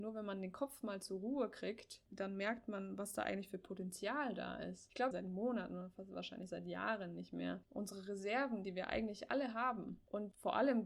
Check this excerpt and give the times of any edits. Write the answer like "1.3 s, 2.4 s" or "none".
5.1 s, 7.6 s